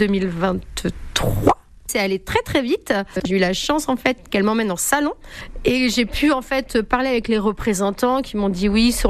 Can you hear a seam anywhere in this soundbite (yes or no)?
yes